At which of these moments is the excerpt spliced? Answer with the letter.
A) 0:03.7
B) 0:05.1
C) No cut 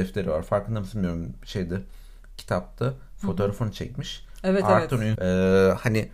B